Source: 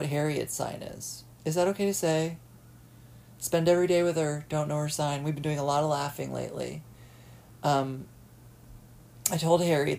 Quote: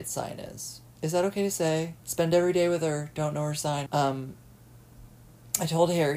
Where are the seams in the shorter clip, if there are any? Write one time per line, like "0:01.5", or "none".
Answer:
0:02.0
0:03.9